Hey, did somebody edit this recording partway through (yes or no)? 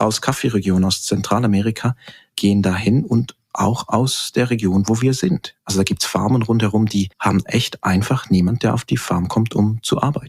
yes